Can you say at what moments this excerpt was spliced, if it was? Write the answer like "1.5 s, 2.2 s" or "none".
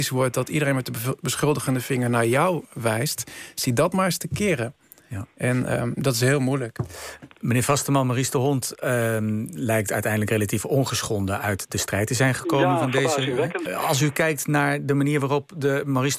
13.7 s